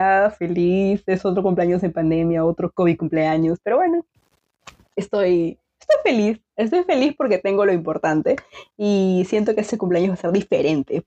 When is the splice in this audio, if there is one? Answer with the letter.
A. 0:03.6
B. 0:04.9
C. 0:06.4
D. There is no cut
D